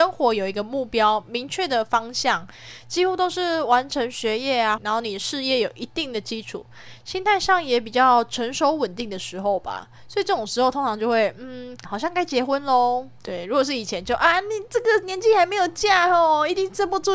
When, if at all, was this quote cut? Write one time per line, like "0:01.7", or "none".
0:04.8
0:11.8
0:13.2